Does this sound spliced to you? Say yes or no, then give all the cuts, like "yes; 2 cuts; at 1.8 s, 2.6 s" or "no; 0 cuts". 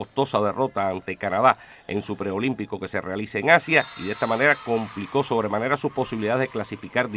no; 0 cuts